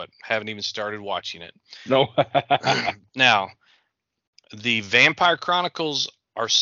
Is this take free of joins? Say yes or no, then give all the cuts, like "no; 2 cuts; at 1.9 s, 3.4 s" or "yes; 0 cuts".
yes; 0 cuts